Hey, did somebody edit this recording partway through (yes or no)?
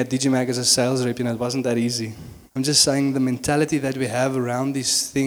yes